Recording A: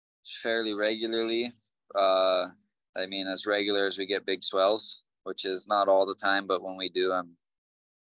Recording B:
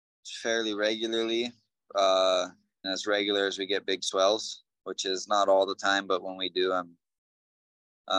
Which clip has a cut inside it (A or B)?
B